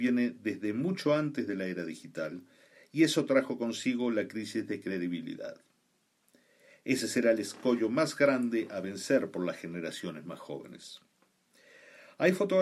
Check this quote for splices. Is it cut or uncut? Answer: uncut